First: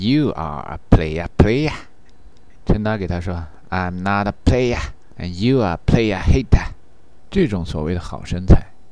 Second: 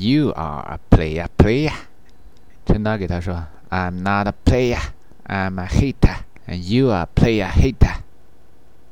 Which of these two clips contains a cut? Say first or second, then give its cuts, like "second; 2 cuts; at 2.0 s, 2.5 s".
first; 2 cuts; at 5.1 s, 7.1 s